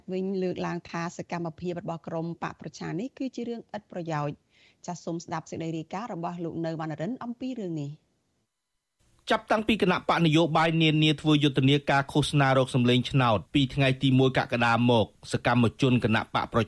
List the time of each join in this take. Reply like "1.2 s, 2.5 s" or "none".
none